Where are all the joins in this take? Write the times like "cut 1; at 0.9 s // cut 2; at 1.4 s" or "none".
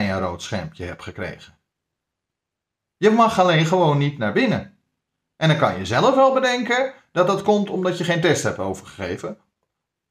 none